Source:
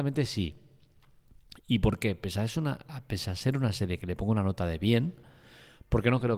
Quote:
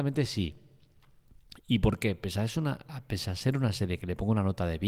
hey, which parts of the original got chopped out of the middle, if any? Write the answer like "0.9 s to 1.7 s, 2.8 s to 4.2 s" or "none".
none